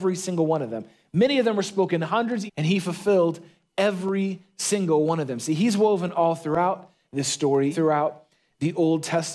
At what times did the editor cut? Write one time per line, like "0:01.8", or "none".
0:02.5
0:07.7